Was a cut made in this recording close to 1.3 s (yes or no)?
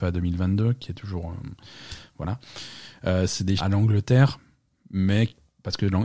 no